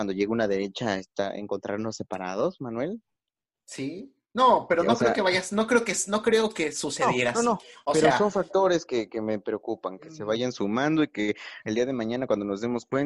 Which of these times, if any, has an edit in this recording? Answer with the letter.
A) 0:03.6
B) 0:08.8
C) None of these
C